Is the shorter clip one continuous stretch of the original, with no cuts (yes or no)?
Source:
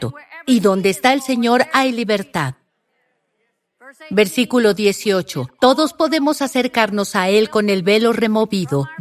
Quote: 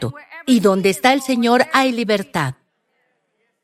yes